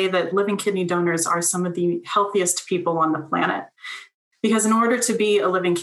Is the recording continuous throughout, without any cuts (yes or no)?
yes